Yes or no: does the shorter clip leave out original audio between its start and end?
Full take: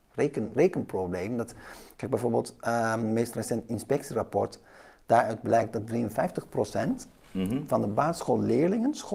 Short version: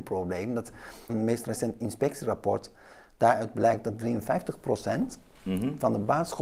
yes